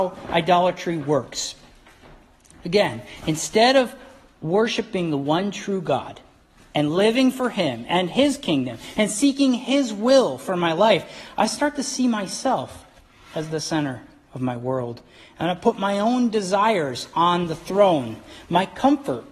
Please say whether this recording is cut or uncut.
uncut